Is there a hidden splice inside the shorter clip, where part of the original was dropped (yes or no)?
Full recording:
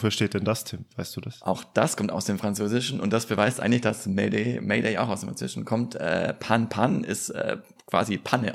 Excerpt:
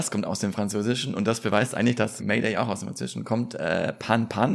yes